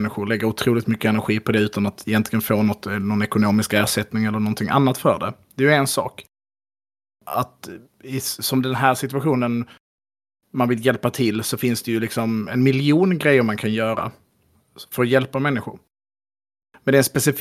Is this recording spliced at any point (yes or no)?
no